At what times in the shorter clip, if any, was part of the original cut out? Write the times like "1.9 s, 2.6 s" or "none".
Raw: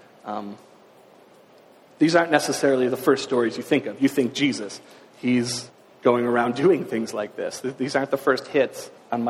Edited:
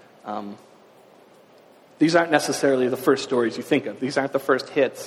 4.0 s